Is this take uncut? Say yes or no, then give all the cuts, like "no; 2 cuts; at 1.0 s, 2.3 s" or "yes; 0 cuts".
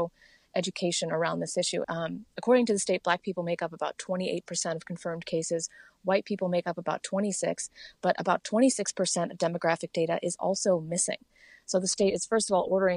no; 1 cut; at 1.8 s